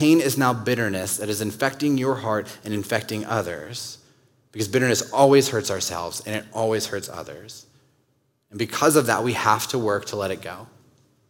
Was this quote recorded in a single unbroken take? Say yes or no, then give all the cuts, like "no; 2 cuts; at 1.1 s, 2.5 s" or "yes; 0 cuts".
yes; 0 cuts